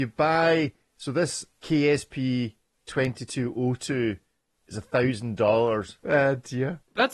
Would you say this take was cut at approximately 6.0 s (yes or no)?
yes